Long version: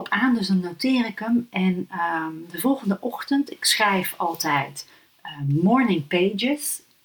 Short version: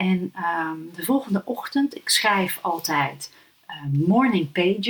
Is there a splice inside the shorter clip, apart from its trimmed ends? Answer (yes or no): no